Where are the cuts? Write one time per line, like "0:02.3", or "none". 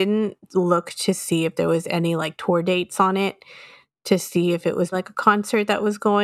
0:04.9